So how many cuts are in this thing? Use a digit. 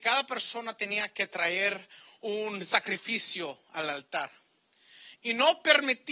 1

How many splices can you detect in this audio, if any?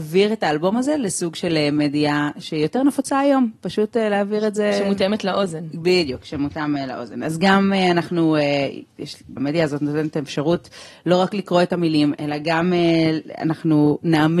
1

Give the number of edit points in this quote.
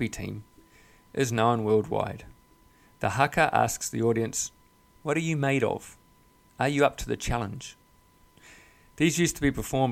0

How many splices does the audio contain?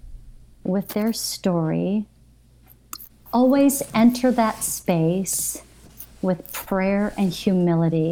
1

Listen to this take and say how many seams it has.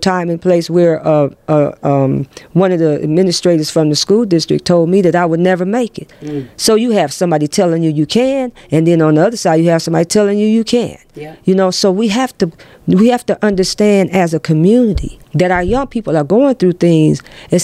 1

